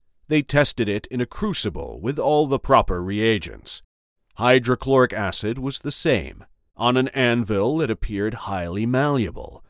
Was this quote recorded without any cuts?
no; 2 cuts; at 4.2 s, 6.7 s

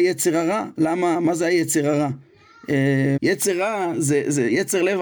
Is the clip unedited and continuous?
no; 1 cut; at 3.2 s

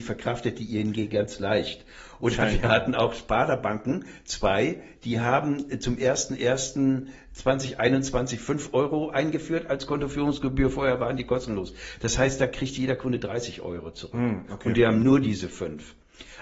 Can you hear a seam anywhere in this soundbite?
no; 0 cuts

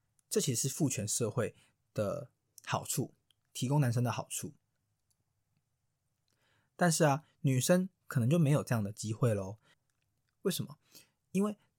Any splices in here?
yes; 1 cut; at 9.7 s

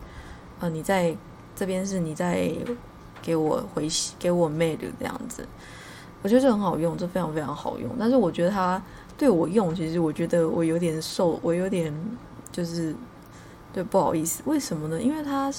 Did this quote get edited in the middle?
no; 0 cuts

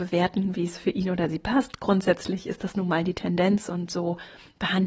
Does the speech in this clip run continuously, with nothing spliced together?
yes; 0 cuts

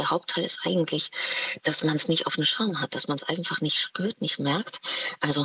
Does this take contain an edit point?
no; 0 cuts

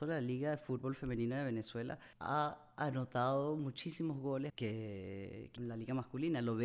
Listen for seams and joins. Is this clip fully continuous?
no; 3 cuts; at 2.1 s, 4.5 s, 5.6 s

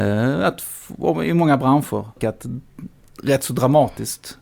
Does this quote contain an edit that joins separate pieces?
yes; 1 cut; at 2.2 s

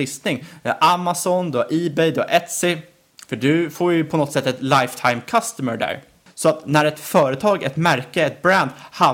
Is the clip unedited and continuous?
no; 2 cuts; at 3.3 s, 6.3 s

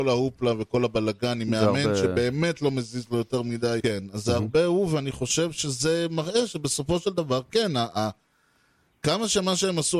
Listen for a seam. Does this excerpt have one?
yes; 1 cut; at 3.8 s

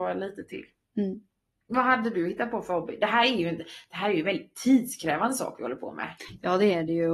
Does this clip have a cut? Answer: no; 0 cuts

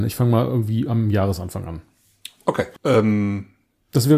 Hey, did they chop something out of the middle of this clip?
yes; 1 cut; at 2.8 s

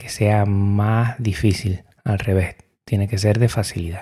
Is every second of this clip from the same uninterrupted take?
yes; 0 cuts

